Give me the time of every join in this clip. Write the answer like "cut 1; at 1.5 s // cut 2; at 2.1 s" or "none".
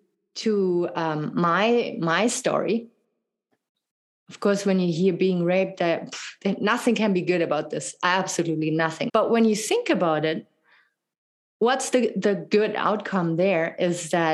cut 1; at 9.1 s